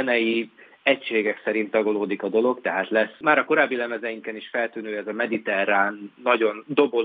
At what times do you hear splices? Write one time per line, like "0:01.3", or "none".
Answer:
none